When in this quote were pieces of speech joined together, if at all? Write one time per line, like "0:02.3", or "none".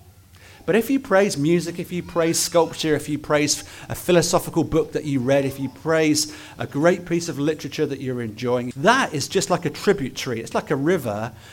0:08.7
0:10.5